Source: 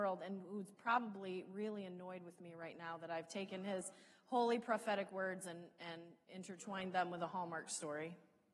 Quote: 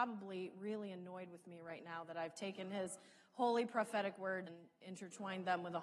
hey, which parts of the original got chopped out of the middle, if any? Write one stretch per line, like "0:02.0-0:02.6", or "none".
0:05.4-0:05.9

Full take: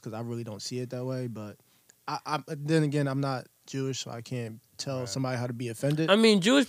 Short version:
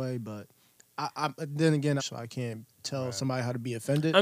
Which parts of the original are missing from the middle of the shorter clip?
0:03.1-0:03.9

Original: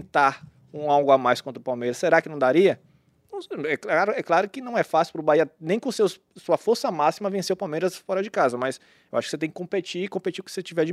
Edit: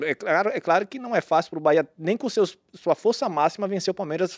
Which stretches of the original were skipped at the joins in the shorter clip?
none

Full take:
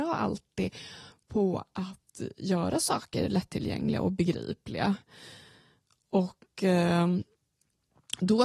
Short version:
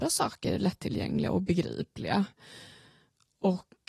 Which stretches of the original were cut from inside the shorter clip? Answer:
none

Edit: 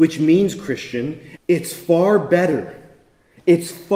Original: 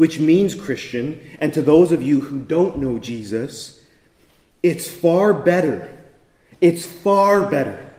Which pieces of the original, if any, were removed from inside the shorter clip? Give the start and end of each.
0:01.4-0:04.5

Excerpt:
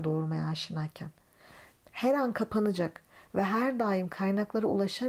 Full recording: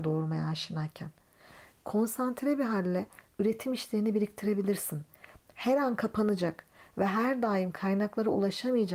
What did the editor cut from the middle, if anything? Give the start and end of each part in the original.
0:01.8-0:05.4

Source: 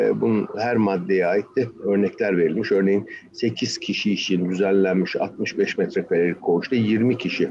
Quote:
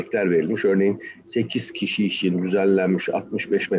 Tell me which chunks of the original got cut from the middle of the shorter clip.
none

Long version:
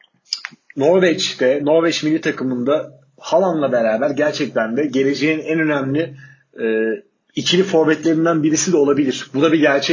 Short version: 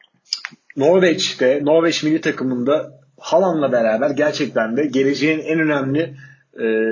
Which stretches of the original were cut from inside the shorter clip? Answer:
none

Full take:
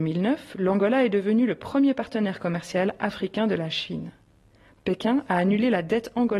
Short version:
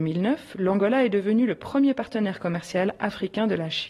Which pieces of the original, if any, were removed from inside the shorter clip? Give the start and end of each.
none

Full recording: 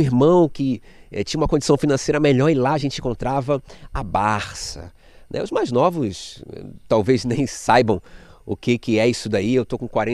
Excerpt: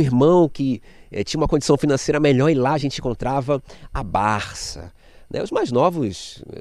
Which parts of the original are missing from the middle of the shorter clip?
none

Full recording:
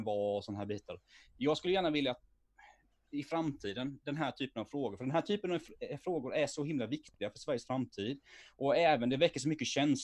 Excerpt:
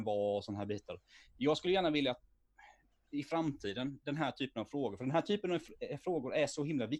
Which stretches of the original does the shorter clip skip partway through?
none

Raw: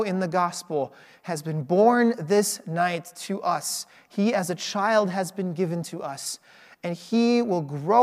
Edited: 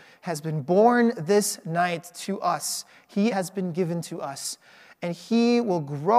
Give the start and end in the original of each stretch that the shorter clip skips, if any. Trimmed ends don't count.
0:04.3-0:05.1

